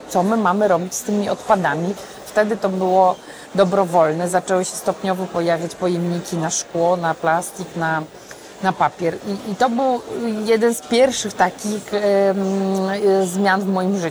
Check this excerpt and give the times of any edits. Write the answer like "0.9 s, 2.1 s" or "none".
2.3 s